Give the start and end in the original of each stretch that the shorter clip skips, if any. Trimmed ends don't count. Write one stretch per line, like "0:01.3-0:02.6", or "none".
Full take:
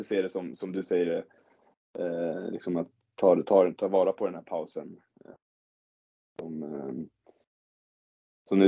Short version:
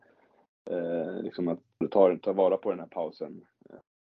0:03.1-0:03.4